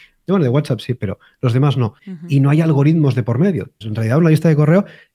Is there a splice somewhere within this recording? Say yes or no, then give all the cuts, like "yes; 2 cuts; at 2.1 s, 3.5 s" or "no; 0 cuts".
yes; 2 cuts; at 2.0 s, 3.8 s